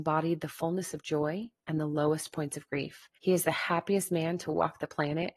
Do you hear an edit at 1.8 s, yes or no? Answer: no